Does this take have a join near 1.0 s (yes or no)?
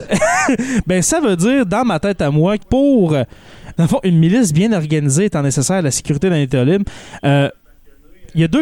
no